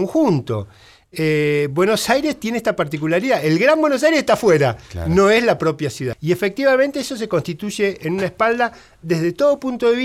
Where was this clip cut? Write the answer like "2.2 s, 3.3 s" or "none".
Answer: 6.1 s